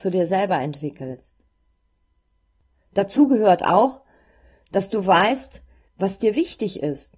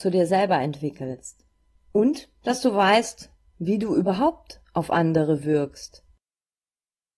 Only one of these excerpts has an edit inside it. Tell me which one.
second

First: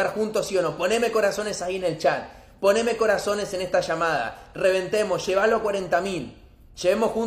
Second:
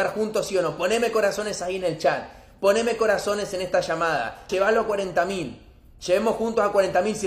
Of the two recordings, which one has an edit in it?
second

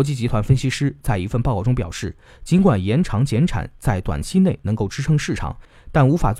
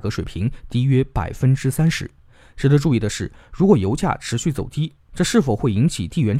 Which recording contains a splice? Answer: second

